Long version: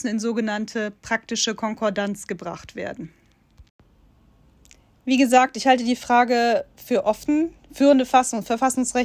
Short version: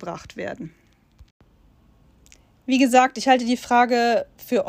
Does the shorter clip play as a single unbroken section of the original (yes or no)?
yes